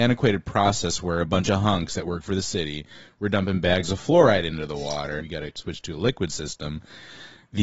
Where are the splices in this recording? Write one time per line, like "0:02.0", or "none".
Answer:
0:05.2